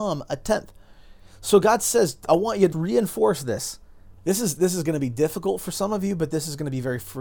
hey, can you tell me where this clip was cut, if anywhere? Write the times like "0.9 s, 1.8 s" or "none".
2.7 s, 4.2 s